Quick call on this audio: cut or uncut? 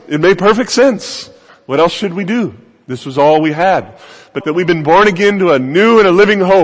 cut